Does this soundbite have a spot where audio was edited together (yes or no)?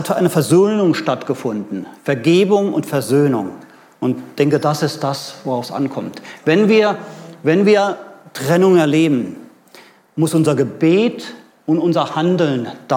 no